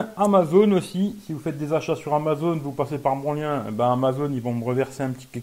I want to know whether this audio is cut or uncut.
uncut